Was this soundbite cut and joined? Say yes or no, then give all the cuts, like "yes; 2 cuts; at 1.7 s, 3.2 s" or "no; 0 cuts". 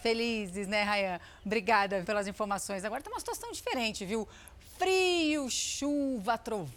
yes; 1 cut; at 2.0 s